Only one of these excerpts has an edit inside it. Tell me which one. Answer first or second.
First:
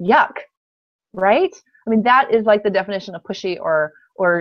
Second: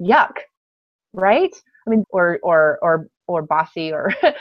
second